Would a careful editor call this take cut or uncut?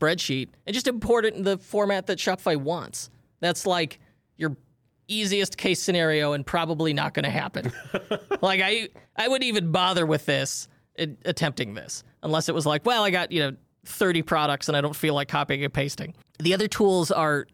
uncut